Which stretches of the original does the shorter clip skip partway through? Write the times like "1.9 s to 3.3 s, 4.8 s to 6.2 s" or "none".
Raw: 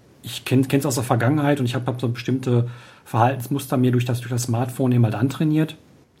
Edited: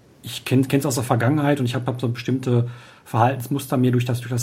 none